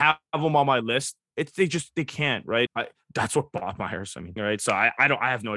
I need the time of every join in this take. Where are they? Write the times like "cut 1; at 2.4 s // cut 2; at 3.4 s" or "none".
cut 1; at 1.3 s // cut 2; at 2.7 s // cut 3; at 4.4 s

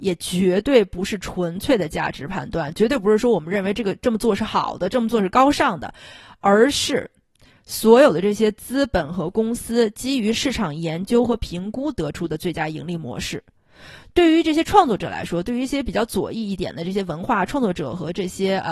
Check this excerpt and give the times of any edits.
none

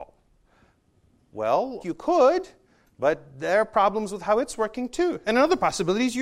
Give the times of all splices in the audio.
cut 1; at 1.8 s

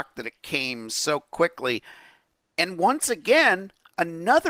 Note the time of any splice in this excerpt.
none

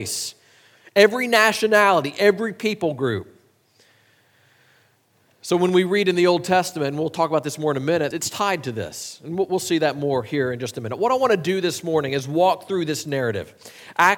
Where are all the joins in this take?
cut 1; at 8.1 s

